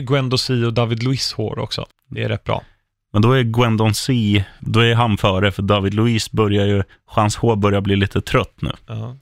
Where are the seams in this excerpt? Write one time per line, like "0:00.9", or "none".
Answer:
0:01.9
0:04.6